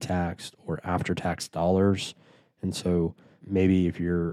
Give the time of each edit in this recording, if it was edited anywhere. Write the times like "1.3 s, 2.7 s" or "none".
none